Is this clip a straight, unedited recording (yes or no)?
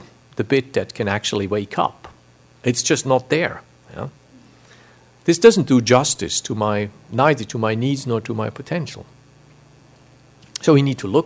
yes